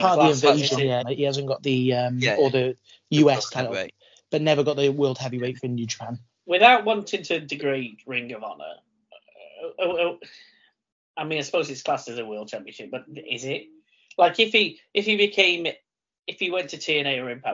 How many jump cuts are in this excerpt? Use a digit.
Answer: 1